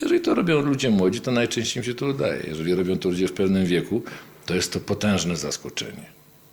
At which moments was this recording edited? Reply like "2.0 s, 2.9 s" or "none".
none